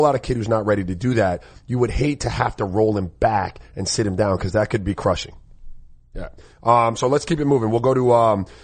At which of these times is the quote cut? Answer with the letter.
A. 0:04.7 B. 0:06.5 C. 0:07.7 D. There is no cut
D